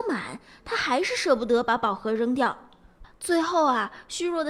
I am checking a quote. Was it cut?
yes; 1 cut; at 3.0 s

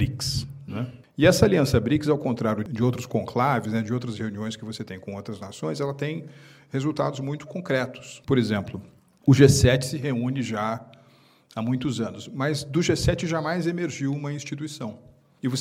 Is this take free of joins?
yes; 0 cuts

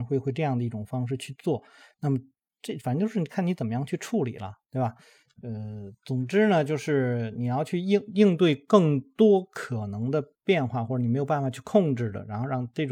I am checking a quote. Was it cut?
no; 0 cuts

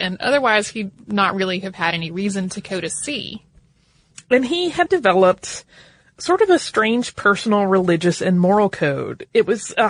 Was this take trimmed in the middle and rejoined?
yes; 1 cut; at 4.9 s

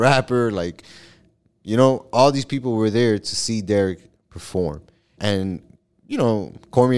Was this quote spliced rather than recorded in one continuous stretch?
yes; 1 cut; at 5.2 s

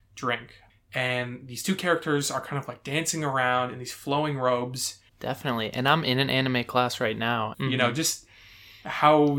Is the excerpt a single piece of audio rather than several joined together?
no; 2 cuts; at 5.1 s, 7.5 s

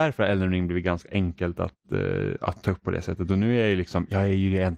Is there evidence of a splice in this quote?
no; 0 cuts

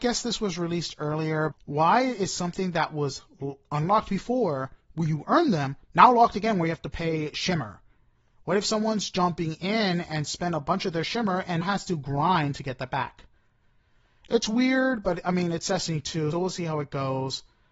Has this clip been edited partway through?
yes; 3 cuts; at 1.5 s, 11.6 s, 16.3 s

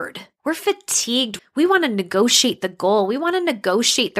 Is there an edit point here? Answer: yes; 1 cut; at 1.4 s

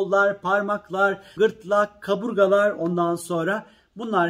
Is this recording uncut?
no; 1 cut; at 1.4 s

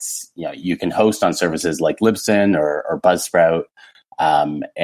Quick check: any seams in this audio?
no; 0 cuts

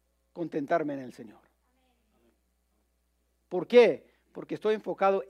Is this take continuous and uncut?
yes; 0 cuts

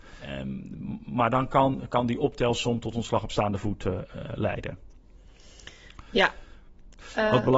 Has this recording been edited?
no; 0 cuts

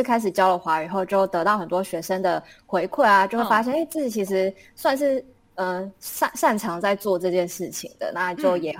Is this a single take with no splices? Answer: yes; 0 cuts

